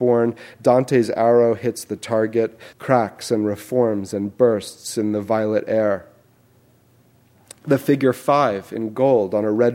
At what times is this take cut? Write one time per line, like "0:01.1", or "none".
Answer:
0:02.7